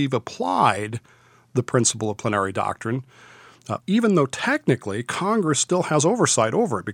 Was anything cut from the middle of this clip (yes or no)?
yes